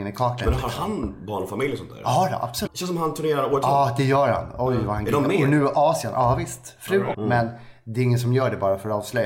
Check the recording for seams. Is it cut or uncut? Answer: cut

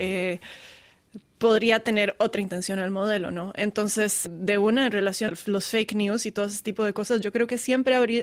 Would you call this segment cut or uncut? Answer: cut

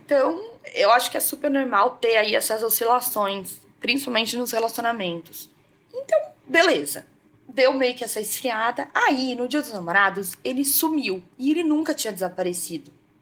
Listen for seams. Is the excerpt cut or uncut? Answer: uncut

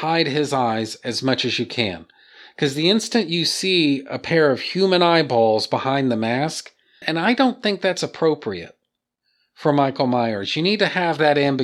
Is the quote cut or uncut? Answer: cut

